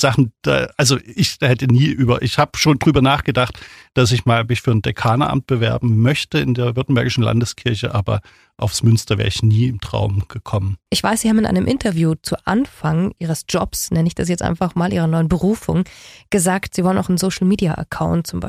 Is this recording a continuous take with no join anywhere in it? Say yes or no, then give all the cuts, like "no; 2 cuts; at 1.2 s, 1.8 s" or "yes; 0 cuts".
yes; 0 cuts